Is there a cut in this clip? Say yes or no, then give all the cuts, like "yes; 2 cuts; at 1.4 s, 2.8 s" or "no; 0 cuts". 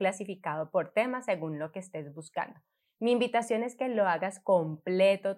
no; 0 cuts